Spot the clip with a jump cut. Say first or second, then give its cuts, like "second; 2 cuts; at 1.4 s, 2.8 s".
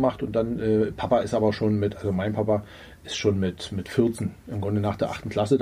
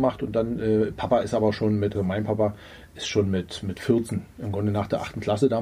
second; 1 cut; at 1.9 s